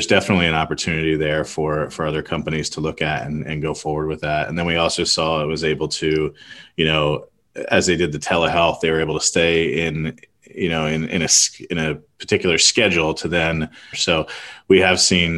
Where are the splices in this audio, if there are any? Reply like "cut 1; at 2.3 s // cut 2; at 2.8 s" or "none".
cut 1; at 13.9 s